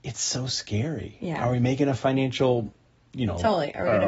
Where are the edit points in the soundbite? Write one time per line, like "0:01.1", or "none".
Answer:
none